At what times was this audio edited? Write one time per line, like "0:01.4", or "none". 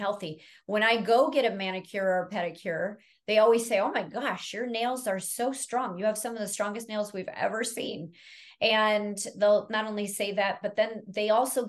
none